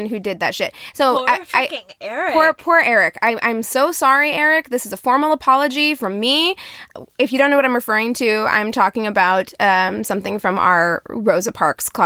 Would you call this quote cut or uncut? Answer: uncut